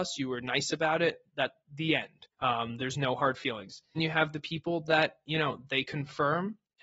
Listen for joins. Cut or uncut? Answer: cut